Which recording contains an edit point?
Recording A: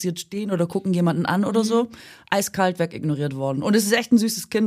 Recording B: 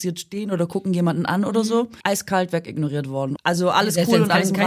B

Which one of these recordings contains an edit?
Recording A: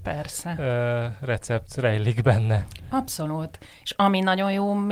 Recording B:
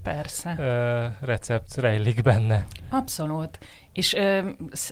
A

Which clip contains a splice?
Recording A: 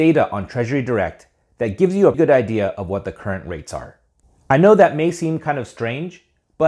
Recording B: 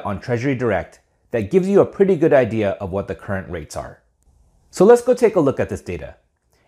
A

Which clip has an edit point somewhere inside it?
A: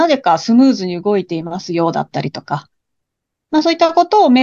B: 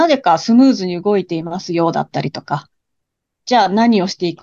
B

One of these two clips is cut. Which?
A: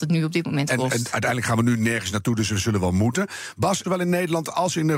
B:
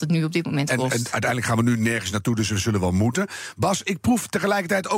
A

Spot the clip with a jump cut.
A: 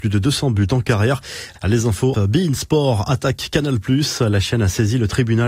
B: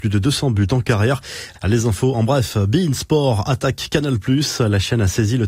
A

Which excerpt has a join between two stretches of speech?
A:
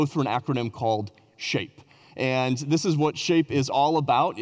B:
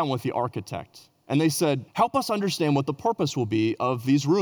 B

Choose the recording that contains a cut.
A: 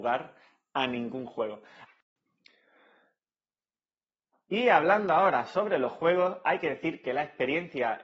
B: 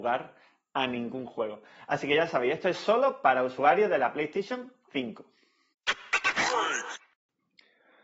A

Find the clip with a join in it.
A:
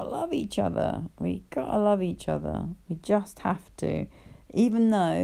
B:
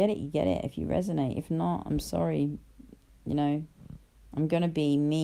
A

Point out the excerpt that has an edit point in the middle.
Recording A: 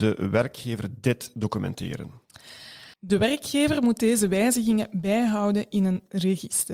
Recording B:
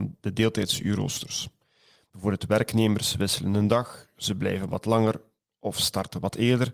A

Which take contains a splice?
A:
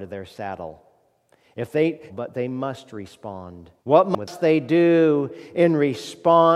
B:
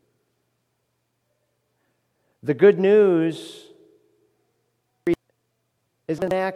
A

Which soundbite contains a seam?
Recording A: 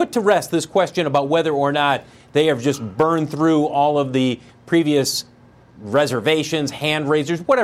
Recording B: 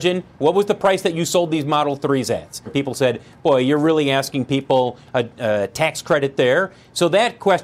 B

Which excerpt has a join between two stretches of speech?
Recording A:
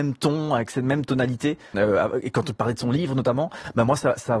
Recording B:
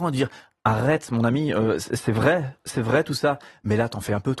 A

